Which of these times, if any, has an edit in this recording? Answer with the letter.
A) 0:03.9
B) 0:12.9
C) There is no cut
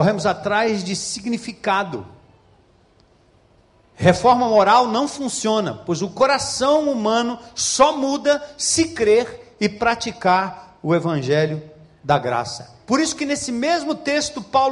C